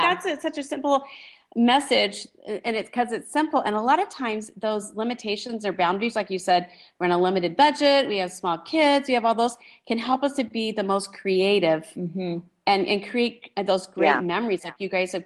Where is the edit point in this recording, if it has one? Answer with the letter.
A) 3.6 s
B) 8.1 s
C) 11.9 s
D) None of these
D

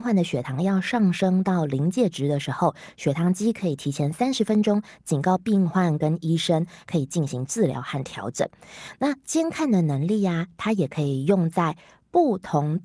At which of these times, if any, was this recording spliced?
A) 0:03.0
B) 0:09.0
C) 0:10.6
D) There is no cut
D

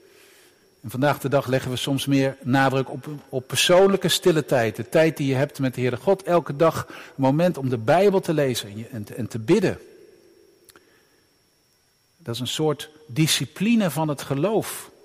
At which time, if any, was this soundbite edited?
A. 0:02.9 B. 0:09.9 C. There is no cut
C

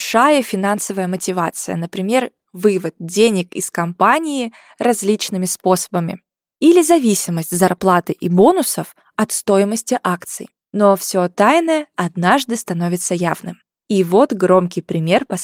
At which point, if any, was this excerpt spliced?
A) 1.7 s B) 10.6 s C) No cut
B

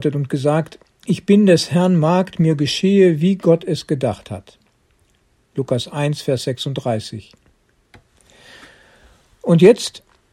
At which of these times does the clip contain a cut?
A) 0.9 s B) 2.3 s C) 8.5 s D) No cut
D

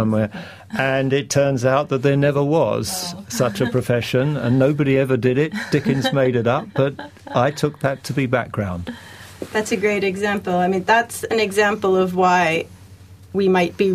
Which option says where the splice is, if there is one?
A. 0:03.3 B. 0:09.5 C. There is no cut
C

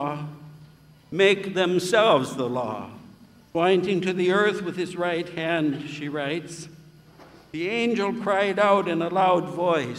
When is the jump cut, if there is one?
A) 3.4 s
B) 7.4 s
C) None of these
A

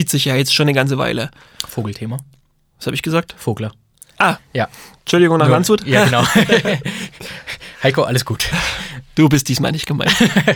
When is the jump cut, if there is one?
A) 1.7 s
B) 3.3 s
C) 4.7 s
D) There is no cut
D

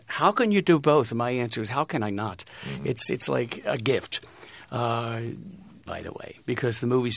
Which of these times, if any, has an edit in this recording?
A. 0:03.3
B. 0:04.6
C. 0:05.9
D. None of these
C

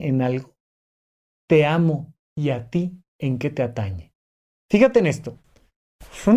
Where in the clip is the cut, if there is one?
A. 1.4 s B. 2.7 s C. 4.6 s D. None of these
D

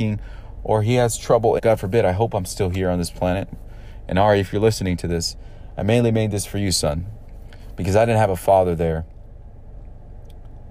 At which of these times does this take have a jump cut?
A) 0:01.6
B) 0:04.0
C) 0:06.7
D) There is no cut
A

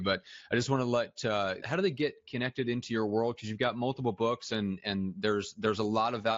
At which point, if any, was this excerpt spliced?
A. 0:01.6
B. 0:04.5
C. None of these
A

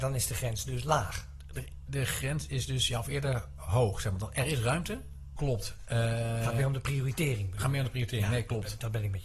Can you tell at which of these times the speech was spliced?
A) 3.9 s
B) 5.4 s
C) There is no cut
B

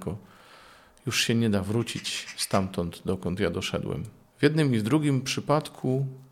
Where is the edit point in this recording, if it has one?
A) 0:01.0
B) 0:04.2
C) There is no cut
C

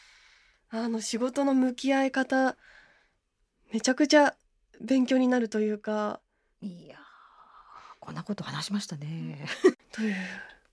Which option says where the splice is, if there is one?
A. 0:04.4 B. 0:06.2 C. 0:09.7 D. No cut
C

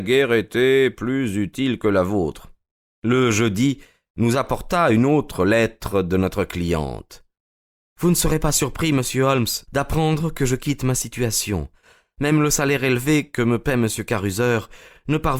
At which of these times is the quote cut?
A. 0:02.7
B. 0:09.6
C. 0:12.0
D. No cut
B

